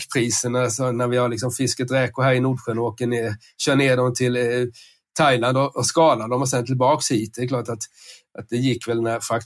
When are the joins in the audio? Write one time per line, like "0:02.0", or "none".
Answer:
none

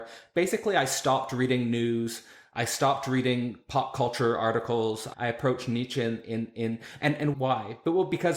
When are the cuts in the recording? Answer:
0:05.1
0:07.3

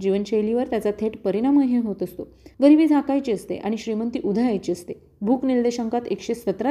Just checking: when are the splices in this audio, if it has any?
0:02.5

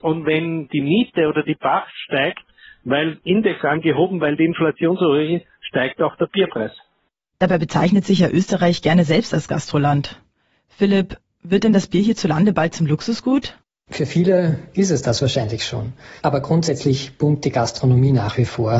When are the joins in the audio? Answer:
0:16.2

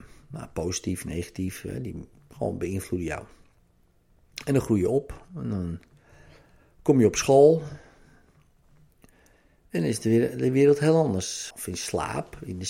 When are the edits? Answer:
0:11.5

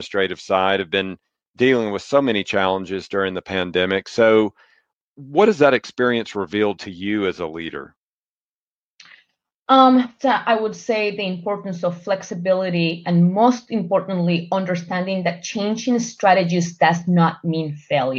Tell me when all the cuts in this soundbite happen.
0:10.2

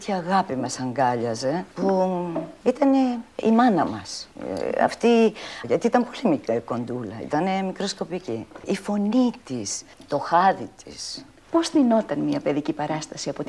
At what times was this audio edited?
0:03.4
0:05.6

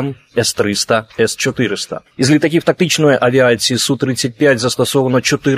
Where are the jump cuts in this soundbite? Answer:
none

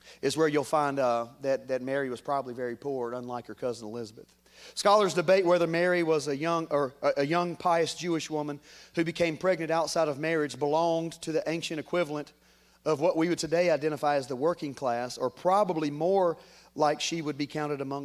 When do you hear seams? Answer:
none

